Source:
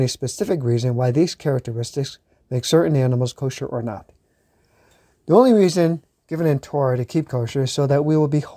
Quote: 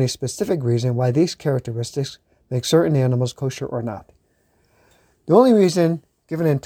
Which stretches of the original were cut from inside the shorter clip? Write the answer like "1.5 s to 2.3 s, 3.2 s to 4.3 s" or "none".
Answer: none